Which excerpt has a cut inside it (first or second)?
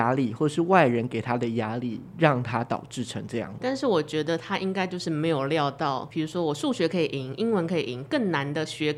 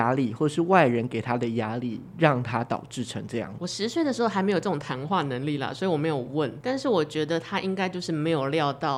first